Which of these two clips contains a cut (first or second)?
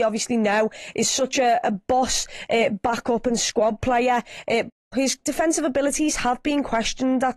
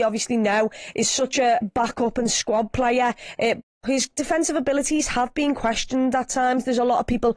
second